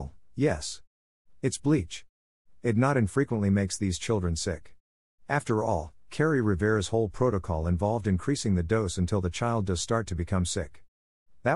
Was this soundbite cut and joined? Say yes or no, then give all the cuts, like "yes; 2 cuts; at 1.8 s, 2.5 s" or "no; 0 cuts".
no; 0 cuts